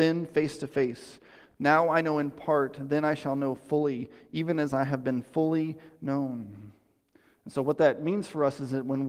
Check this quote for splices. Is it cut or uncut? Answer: uncut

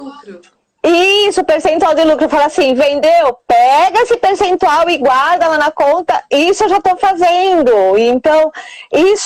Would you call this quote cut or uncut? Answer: uncut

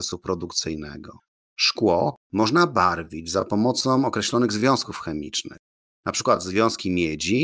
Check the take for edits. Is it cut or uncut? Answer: uncut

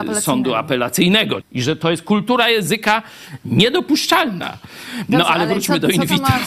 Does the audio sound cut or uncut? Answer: cut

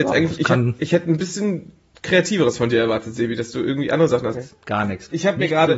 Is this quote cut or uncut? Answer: cut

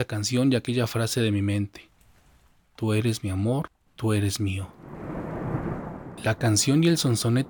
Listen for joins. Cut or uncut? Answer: cut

